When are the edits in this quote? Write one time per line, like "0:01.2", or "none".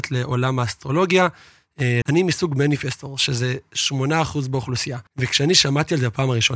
0:02.0
0:05.1